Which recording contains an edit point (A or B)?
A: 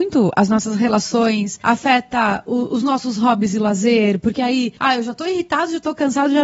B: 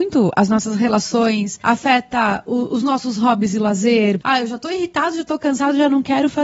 B